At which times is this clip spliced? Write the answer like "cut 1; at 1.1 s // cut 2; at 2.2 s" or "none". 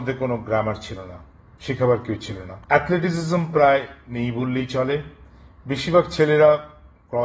cut 1; at 2.6 s